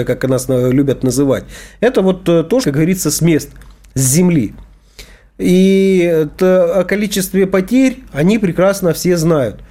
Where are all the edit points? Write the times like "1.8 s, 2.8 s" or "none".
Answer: 2.6 s, 6.4 s